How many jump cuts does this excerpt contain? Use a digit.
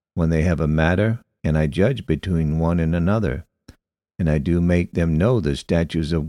1